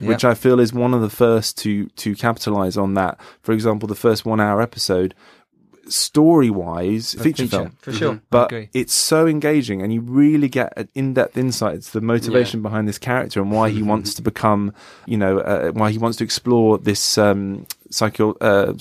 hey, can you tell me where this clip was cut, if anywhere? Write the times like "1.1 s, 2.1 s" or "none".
7.2 s, 15.1 s